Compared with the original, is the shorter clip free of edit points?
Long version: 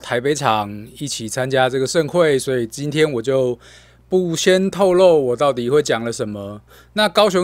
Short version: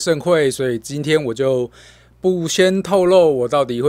yes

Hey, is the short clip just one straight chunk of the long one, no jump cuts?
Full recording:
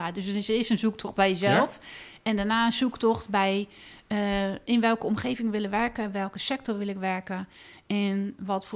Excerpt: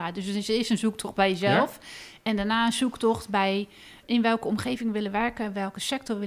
no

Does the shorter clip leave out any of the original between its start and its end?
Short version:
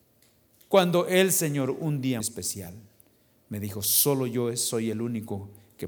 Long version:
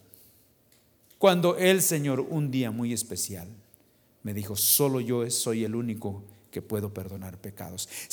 yes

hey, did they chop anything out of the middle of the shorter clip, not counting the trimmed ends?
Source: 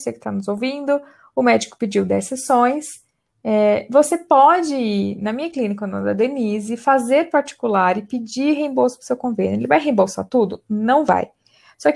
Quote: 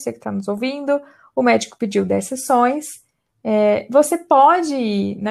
no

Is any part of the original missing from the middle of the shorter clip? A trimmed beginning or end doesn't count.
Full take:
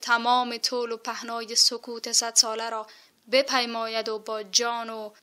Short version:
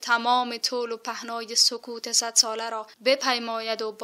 yes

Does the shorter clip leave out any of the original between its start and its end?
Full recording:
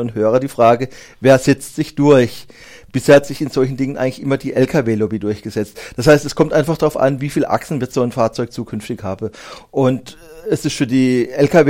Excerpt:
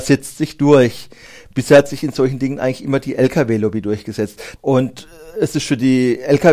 yes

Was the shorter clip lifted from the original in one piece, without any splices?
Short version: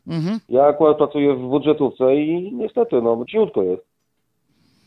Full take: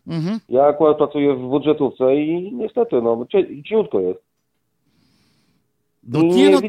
no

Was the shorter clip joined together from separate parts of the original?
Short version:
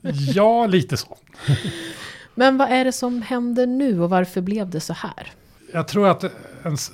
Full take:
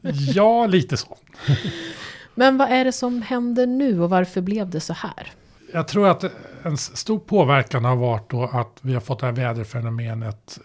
no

